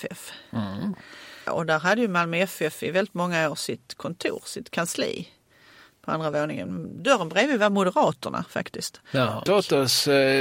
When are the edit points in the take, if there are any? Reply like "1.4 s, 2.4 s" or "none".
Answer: 1.5 s, 9.5 s